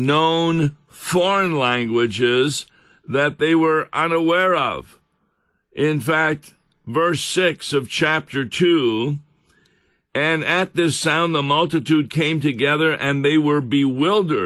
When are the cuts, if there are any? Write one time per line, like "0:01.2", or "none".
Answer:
none